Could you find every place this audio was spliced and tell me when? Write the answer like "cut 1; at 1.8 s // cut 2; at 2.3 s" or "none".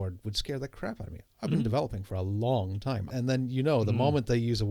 cut 1; at 3.1 s